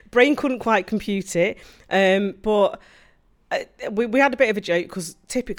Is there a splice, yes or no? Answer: no